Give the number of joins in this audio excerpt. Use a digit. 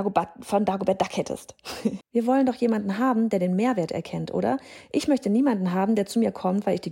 1